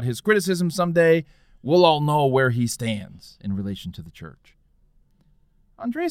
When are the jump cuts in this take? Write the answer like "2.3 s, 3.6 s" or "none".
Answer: none